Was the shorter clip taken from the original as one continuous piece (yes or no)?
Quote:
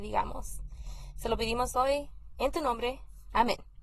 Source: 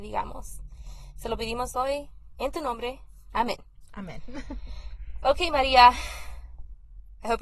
yes